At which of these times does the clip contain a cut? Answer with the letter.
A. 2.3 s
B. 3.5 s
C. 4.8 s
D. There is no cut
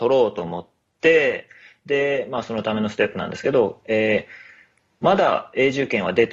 D